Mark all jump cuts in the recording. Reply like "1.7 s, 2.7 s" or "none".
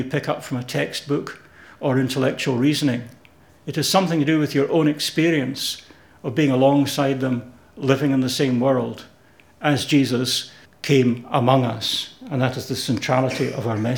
10.6 s